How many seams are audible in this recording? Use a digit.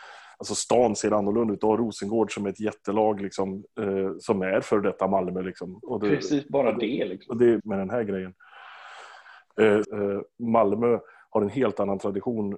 2